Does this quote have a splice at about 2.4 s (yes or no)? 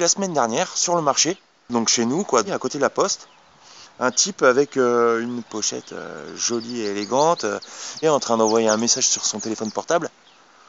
yes